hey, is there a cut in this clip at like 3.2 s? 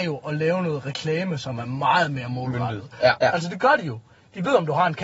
yes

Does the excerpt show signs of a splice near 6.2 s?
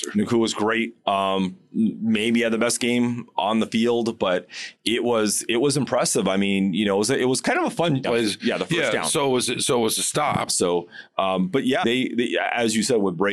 no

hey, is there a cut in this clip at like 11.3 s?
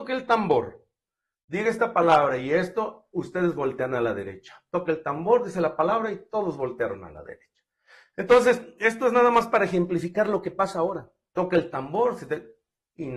yes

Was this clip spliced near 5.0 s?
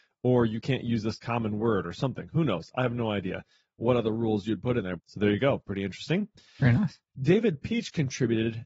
yes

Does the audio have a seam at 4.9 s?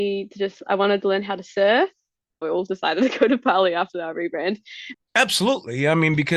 yes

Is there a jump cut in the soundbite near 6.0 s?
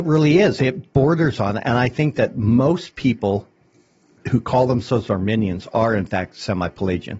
no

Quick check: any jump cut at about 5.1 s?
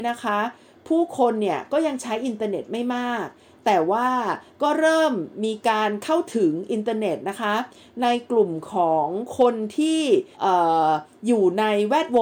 no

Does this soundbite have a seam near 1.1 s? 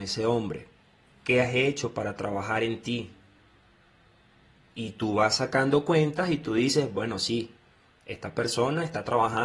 yes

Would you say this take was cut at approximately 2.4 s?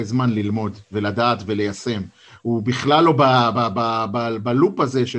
no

